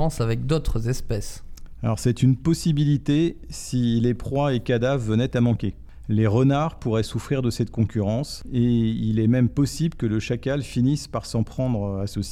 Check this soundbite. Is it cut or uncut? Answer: uncut